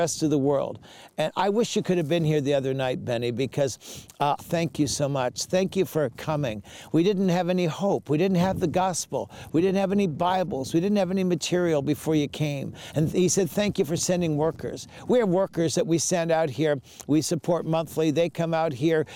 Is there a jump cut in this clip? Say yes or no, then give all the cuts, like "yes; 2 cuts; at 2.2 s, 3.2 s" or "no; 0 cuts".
yes; 1 cut; at 4.4 s